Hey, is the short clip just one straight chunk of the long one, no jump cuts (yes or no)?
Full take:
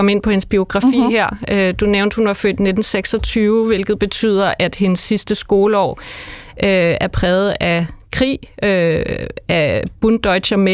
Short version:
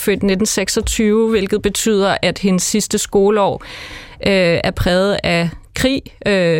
yes